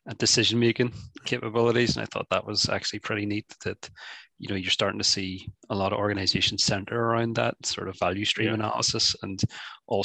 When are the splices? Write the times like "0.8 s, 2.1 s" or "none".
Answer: none